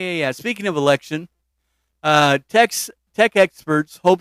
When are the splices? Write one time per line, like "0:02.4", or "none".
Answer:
none